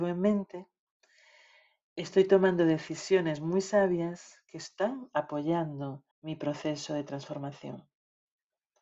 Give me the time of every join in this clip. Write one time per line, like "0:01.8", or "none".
0:06.1